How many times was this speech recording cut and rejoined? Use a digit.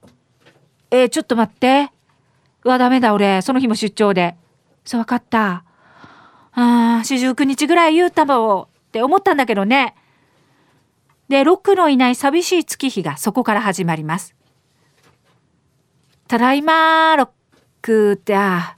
0